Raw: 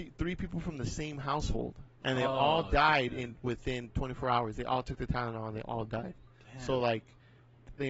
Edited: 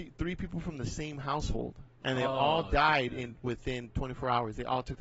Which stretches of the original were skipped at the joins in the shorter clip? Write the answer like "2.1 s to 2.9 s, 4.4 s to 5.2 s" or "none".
none